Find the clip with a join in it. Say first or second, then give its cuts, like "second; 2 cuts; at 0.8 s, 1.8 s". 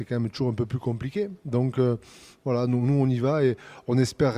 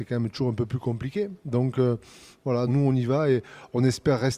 second; 1 cut; at 2.7 s